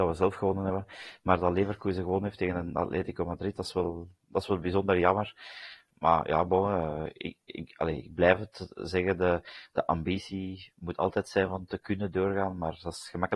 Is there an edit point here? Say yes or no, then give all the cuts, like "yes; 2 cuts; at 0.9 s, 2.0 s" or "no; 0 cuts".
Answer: no; 0 cuts